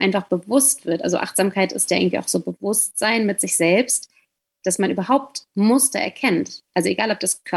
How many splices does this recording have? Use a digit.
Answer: 0